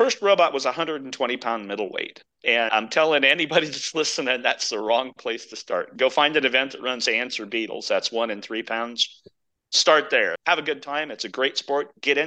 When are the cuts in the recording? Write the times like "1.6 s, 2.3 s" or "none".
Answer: 10.4 s

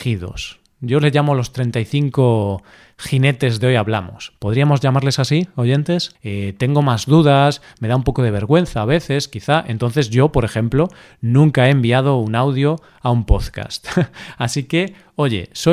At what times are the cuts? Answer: 6.1 s

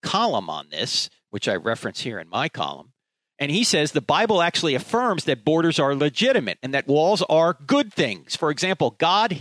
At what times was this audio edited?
none

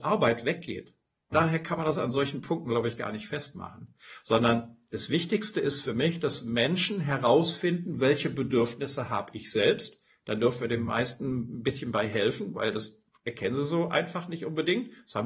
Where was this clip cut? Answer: 1.3 s

